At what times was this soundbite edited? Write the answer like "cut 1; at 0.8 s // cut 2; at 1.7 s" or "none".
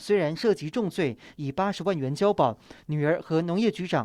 cut 1; at 1.3 s